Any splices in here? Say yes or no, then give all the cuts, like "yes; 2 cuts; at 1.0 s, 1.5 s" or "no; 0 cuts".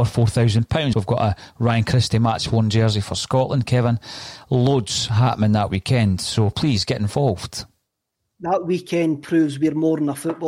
yes; 1 cut; at 0.9 s